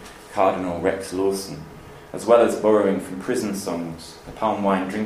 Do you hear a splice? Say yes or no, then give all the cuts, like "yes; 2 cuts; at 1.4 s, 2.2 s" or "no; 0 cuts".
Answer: no; 0 cuts